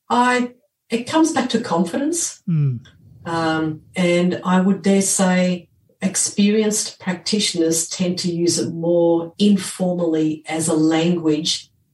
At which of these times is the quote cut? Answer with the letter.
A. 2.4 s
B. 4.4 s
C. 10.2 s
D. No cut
D